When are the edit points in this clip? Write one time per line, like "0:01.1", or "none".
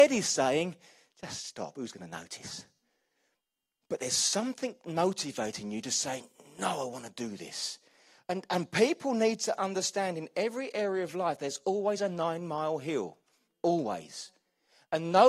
none